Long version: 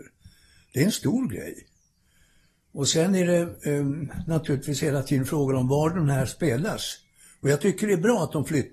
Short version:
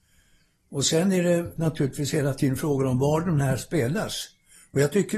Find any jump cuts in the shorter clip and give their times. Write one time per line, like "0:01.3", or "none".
0:01.6